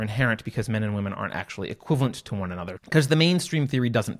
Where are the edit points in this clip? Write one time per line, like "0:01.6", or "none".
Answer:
0:02.8